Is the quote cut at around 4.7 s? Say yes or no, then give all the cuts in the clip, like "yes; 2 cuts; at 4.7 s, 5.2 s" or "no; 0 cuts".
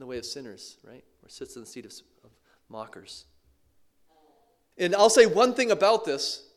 yes; 1 cut; at 4.7 s